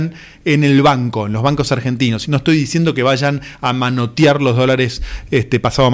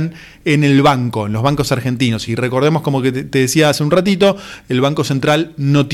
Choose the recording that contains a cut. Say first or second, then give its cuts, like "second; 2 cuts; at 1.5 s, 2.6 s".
first; 1 cut; at 2.2 s